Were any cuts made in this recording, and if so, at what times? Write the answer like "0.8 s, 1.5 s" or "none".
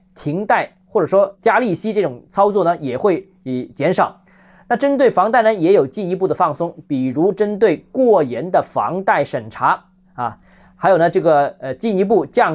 none